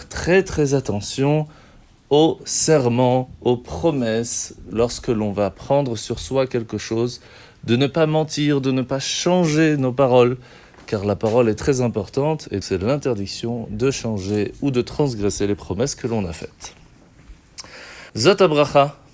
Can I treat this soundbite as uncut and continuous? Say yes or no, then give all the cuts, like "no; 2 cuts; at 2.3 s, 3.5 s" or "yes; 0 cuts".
no; 3 cuts; at 11.6 s, 12.6 s, 18.1 s